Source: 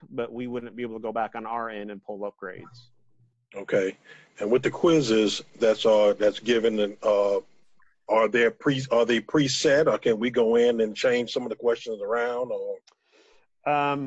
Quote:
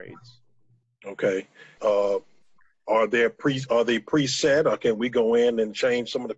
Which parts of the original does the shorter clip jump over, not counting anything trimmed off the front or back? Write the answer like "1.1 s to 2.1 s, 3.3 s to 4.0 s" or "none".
4.3 s to 7.0 s